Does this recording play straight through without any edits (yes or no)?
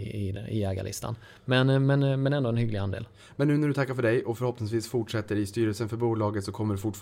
yes